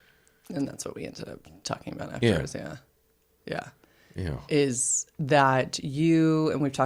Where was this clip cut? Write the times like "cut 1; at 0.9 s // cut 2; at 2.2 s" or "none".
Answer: none